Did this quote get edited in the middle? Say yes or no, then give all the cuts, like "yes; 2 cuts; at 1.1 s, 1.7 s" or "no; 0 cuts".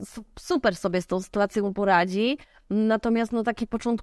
no; 0 cuts